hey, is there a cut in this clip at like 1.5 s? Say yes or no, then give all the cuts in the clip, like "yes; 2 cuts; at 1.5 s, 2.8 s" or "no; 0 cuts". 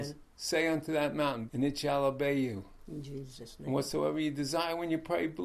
yes; 1 cut; at 1.5 s